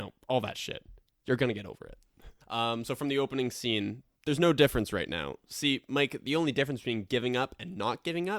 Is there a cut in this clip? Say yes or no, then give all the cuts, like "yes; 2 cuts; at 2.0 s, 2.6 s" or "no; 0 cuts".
yes; 1 cut; at 2.4 s